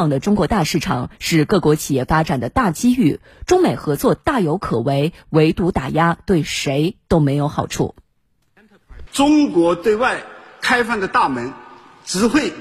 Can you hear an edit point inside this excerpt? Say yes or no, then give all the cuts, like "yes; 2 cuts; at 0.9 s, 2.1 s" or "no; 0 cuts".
yes; 1 cut; at 9.1 s